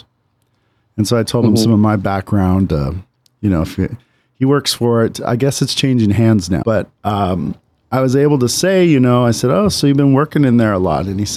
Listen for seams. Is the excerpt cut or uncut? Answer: cut